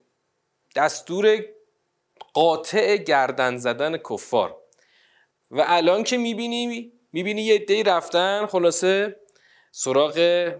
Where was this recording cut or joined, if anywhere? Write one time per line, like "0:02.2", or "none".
none